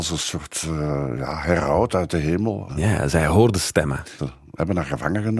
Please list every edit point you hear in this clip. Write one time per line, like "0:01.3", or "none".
0:02.7
0:04.2